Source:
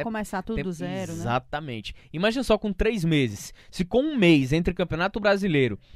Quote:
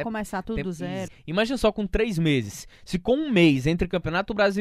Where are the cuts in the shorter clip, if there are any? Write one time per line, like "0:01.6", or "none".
0:01.1